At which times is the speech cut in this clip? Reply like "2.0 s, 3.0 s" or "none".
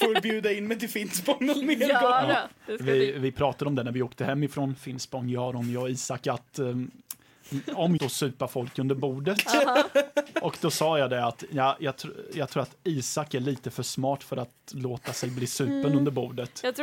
8.0 s